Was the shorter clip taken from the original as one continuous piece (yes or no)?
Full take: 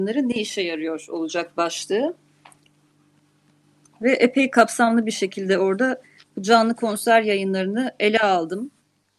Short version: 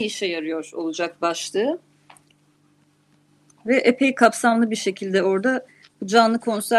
yes